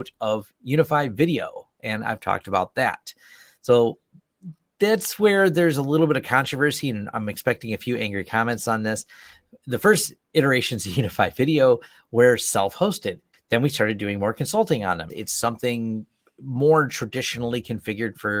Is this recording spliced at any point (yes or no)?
yes